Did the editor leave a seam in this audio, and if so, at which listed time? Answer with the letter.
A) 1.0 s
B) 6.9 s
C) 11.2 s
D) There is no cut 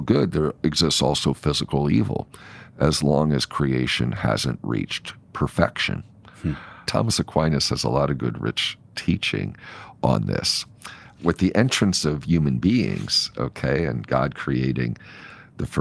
B